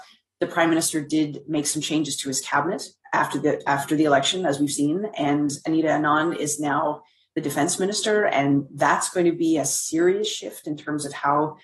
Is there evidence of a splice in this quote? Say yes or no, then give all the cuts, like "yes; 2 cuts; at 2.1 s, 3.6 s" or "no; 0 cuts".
no; 0 cuts